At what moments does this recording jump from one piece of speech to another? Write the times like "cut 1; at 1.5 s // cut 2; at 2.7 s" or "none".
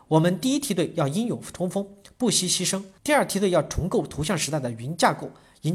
cut 1; at 3.0 s